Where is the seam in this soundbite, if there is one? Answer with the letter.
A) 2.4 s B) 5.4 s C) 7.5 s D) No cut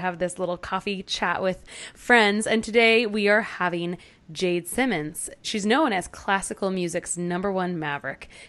B